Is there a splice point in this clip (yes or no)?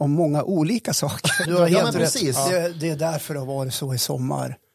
yes